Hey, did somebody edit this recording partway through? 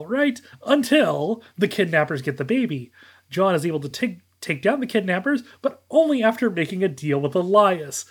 no; 0 cuts

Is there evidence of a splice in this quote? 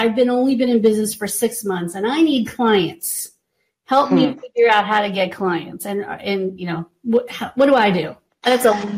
no; 0 cuts

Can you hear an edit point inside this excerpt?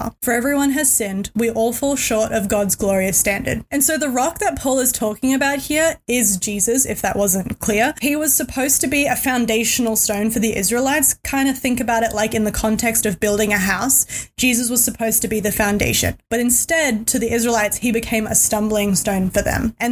no; 0 cuts

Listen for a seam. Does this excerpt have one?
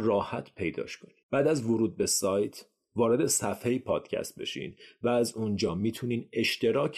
yes; 1 cut; at 1.2 s

